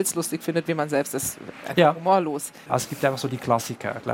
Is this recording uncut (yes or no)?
no